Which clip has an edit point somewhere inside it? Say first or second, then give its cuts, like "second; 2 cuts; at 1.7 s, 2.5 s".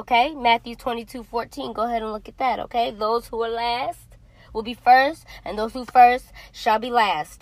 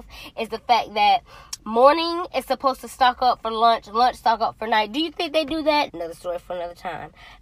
second; 1 cut; at 5.9 s